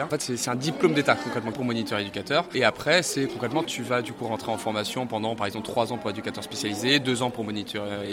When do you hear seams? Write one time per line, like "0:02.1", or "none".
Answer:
0:01.5
0:03.6